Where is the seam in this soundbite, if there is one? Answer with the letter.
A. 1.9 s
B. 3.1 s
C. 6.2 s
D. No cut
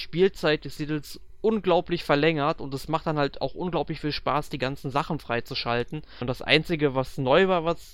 C